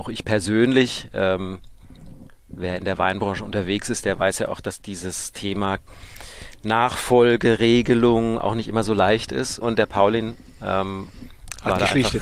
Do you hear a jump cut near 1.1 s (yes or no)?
no